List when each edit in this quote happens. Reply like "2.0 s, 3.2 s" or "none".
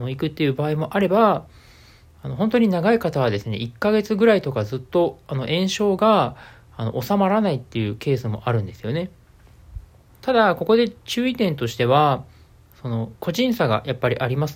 10.1 s